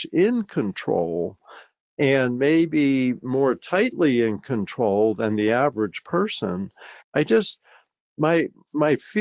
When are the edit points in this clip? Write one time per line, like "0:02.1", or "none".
0:07.0